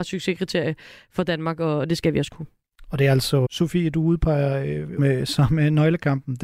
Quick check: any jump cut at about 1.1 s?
no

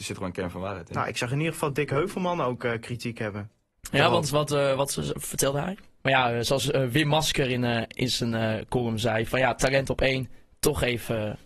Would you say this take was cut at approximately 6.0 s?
yes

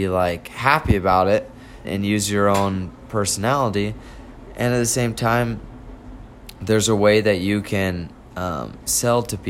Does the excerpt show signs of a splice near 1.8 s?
yes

